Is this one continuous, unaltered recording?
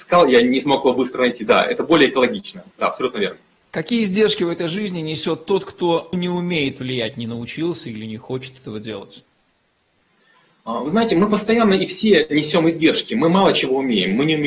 no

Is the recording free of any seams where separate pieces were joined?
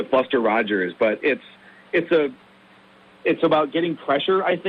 yes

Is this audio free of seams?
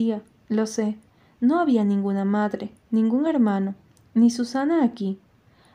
yes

